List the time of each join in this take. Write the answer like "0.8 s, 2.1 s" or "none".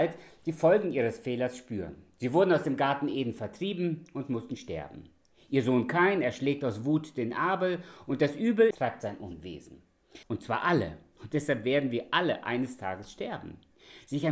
8.7 s, 10.2 s

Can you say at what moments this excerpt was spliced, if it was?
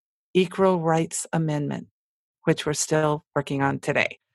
none

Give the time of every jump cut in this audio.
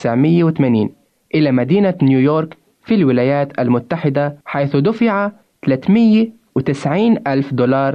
4.4 s

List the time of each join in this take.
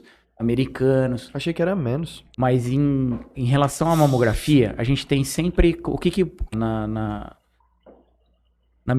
2.3 s, 6.5 s

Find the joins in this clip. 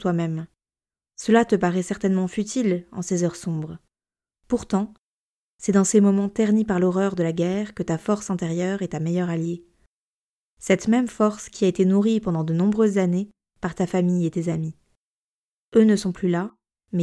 none

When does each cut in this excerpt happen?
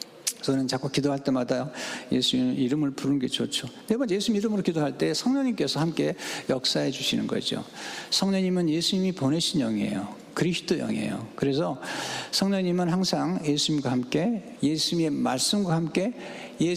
14.5 s

